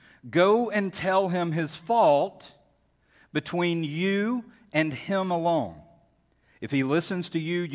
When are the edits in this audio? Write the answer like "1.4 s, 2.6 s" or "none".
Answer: none